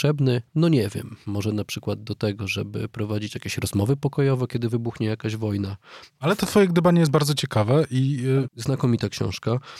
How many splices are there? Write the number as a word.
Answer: two